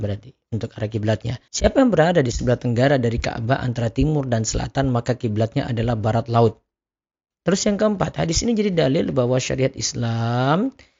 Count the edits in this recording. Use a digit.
2